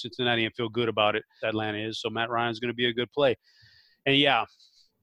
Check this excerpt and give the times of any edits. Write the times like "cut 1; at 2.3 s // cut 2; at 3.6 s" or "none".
cut 1; at 1.4 s